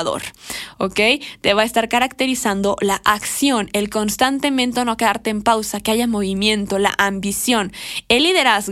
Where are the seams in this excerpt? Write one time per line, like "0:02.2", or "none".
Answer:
none